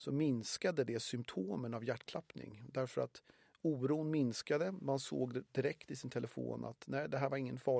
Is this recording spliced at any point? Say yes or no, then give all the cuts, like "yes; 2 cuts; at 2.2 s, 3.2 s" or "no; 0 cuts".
no; 0 cuts